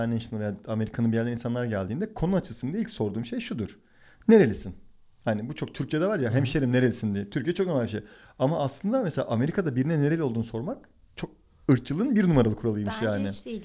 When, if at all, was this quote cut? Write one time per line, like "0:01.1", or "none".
none